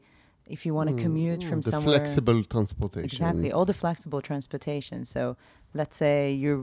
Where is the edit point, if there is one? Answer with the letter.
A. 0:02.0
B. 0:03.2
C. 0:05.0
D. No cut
D